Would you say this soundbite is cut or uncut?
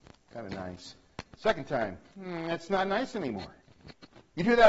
cut